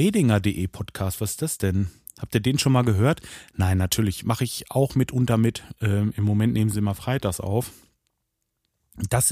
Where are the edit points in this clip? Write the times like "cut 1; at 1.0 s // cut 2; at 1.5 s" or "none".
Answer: none